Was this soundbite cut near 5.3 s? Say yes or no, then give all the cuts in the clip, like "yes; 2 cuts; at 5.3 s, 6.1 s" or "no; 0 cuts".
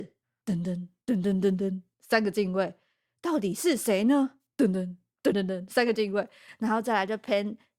yes; 1 cut; at 5.3 s